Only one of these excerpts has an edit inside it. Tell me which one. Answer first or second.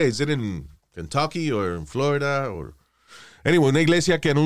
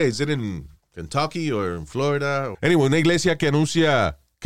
second